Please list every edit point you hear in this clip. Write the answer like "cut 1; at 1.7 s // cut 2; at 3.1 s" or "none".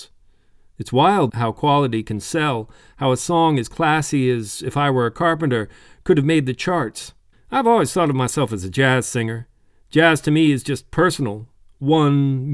cut 1; at 1.3 s // cut 2; at 7.3 s